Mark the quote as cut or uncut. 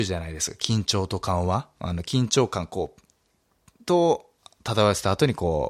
uncut